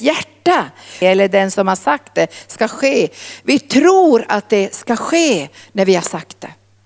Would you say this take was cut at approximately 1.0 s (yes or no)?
yes